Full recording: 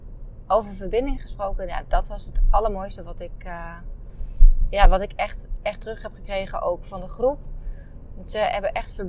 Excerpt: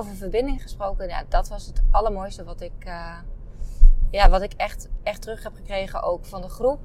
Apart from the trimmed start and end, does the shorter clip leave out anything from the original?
no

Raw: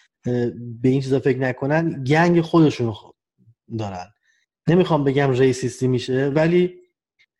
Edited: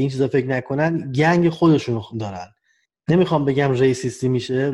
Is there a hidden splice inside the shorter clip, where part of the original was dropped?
yes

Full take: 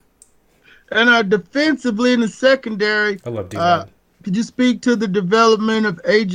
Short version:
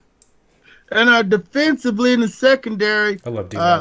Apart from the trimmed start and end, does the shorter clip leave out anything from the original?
no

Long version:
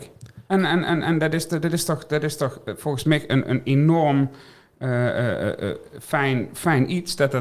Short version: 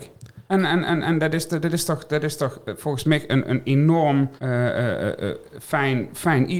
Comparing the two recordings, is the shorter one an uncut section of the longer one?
no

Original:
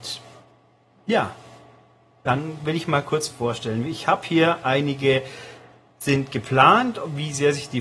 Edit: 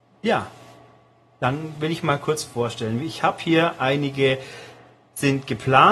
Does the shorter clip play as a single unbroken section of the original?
yes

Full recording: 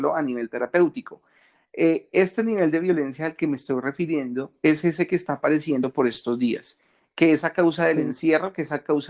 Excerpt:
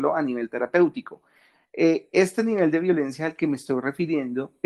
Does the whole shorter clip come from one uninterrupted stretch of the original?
yes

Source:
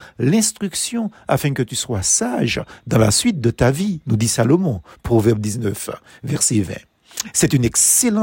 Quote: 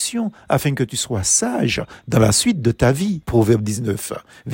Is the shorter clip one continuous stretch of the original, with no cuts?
no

